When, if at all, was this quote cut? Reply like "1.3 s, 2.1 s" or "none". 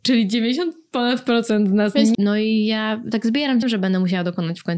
2.1 s, 3.6 s